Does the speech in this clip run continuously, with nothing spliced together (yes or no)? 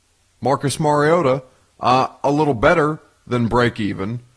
yes